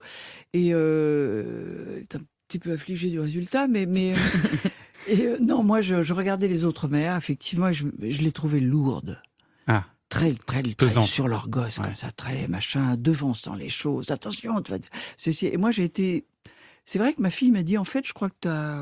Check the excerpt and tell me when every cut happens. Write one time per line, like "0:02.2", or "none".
none